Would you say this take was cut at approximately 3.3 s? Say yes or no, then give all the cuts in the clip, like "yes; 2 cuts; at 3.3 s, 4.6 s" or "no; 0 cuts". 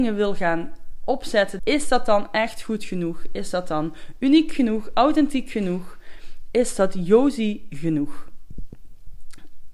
no; 1 cut; at 1.6 s